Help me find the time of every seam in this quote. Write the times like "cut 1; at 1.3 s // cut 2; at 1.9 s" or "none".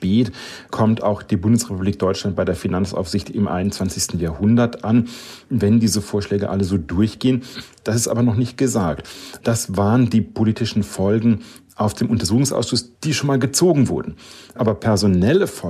none